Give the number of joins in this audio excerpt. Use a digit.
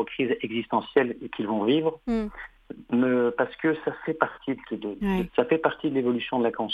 1